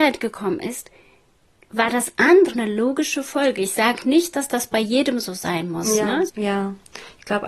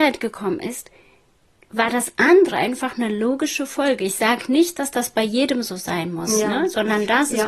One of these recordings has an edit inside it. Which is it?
first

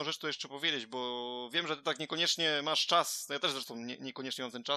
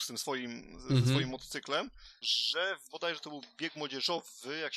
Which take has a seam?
second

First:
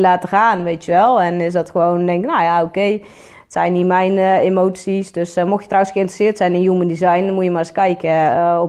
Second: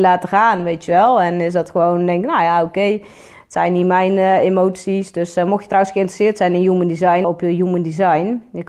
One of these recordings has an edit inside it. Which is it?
second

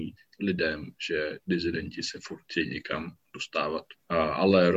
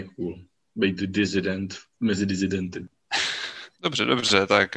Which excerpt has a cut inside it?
second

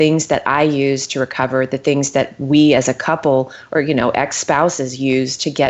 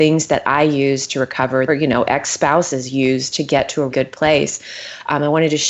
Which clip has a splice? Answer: second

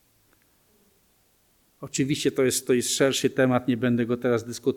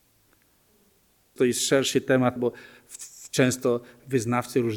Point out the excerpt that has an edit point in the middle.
second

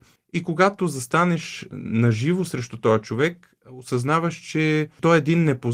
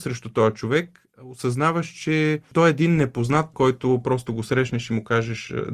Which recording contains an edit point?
second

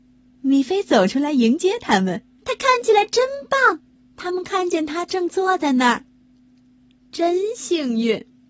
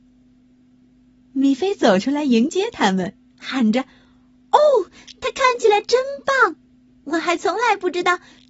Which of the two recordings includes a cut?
first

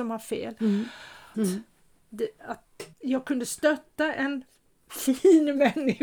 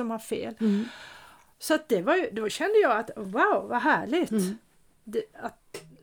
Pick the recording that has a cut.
first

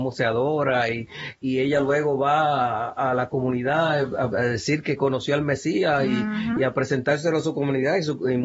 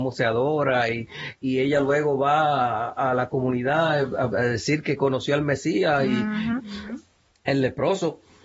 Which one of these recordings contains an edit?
second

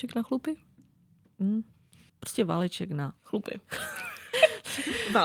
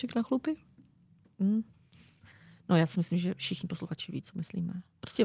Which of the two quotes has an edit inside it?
first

